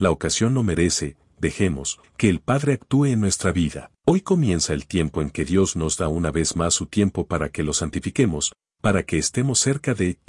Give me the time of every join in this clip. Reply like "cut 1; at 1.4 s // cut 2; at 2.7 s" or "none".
cut 1; at 2.0 s // cut 2; at 4.0 s